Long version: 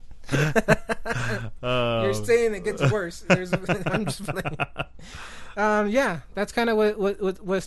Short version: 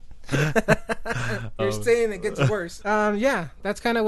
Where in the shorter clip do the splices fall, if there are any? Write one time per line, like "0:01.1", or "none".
0:01.6
0:02.8